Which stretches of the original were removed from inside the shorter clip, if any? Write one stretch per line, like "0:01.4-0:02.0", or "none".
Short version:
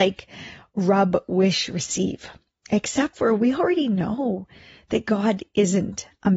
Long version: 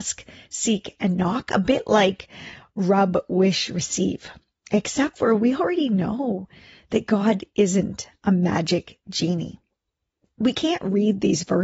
none